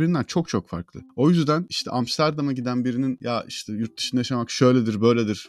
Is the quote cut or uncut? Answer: uncut